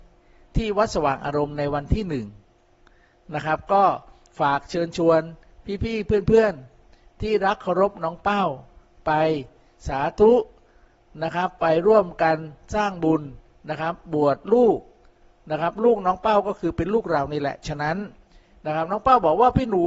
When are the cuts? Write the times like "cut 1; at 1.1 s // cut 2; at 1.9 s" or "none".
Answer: none